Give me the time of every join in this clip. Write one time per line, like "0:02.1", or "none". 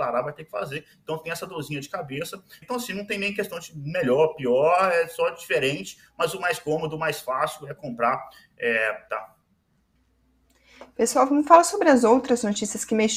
0:02.6
0:09.1